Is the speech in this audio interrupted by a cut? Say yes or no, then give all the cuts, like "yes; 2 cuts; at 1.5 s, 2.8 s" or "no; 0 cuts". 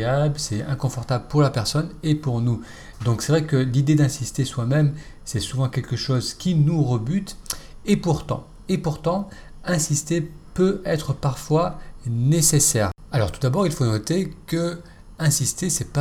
no; 0 cuts